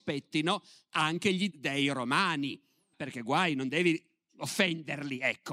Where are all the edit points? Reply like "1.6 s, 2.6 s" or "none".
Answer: 1.5 s, 2.9 s